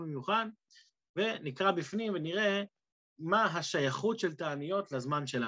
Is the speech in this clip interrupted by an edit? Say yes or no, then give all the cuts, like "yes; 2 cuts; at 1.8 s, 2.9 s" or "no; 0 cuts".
no; 0 cuts